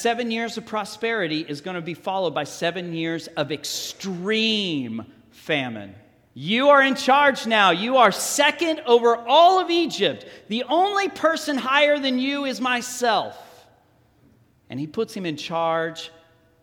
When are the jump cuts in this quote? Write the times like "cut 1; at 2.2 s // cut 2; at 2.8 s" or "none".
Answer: cut 1; at 6.3 s